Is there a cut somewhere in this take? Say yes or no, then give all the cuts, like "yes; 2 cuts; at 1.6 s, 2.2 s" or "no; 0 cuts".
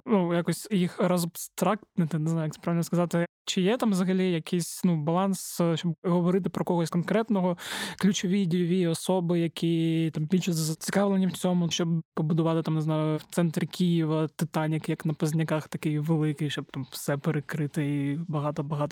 yes; 1 cut; at 11.7 s